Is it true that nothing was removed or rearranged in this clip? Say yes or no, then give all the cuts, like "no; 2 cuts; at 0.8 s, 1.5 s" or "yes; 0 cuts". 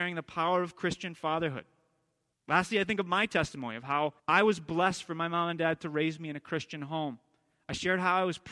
no; 2 cuts; at 2.3 s, 4.2 s